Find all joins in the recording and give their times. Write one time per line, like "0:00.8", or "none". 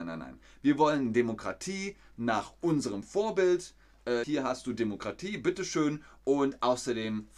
0:04.2